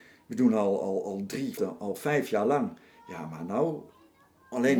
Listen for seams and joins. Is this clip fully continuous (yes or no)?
no